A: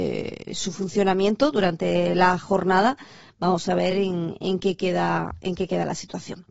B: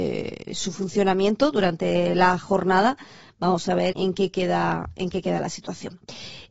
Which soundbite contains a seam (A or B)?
B